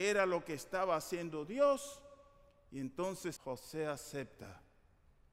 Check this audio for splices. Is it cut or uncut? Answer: cut